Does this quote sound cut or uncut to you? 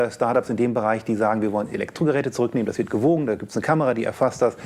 uncut